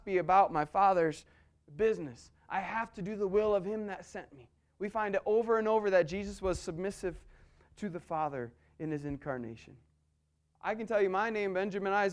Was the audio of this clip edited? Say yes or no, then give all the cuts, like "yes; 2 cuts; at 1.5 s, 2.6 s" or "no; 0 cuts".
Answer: yes; 1 cut; at 10.5 s